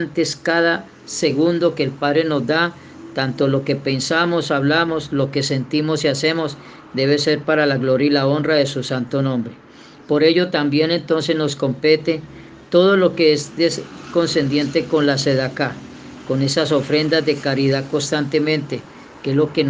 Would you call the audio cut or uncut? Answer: uncut